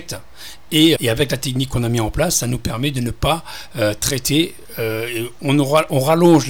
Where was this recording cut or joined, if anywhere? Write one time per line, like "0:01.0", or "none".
0:01.0